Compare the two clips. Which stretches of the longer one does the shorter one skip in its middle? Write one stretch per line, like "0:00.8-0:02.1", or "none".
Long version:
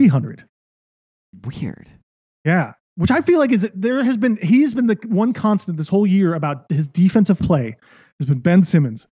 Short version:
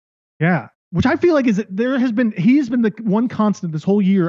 none